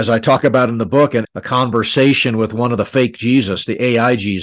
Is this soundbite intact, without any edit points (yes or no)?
no